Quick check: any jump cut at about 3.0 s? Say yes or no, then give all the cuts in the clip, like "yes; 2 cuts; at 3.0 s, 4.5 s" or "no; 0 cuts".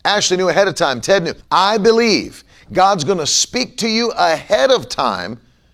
no; 1 cut; at 1.4 s